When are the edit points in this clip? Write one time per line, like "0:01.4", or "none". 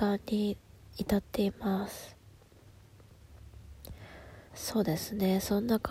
0:04.5